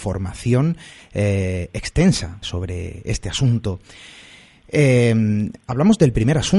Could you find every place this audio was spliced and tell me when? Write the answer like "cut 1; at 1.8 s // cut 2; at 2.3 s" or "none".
cut 1; at 2.4 s